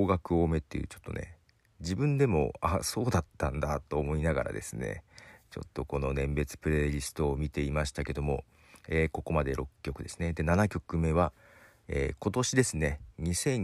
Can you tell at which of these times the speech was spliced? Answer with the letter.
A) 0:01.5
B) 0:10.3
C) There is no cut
C